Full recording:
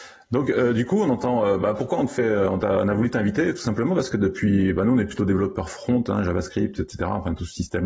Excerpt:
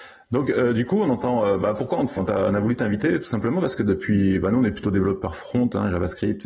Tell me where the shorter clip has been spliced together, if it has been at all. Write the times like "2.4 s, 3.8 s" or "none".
2.2 s

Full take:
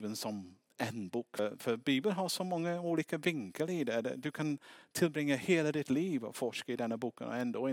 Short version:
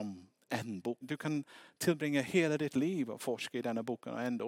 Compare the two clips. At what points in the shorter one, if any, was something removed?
1.0 s

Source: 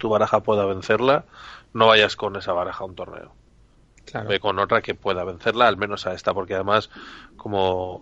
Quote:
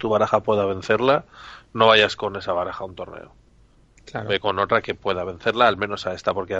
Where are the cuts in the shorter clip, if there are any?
none

